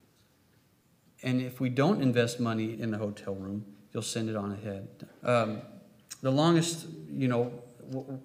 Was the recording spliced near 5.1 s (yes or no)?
yes